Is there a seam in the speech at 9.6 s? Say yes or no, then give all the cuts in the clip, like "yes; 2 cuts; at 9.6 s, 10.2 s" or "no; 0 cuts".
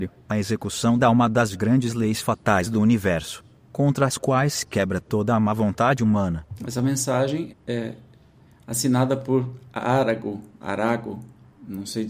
no; 1 cut; at 7.5 s